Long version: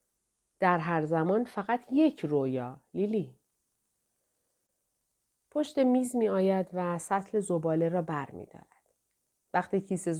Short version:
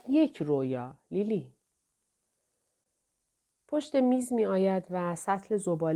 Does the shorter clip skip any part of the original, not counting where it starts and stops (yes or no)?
no